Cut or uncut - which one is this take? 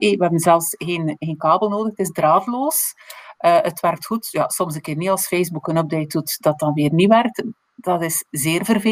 uncut